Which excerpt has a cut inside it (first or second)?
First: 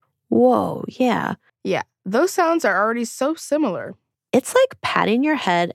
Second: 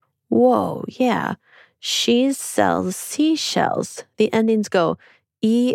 first